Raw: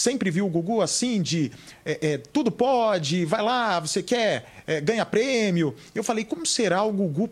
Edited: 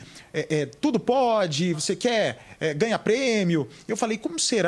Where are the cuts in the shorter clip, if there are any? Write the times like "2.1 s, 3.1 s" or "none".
1.7 s